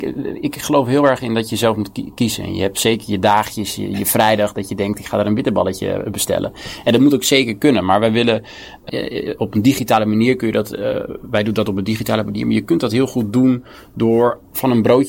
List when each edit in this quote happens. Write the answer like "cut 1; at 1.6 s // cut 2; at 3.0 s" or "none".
cut 1; at 8.9 s